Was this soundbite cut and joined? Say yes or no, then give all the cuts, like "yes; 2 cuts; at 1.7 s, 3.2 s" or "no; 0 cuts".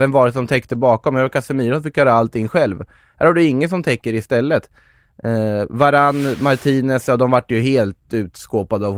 no; 0 cuts